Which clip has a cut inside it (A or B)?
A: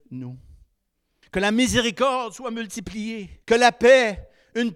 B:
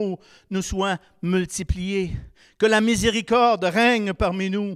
A